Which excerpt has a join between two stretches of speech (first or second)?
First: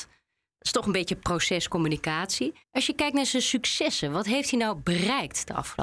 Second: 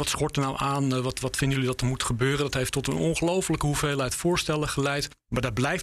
first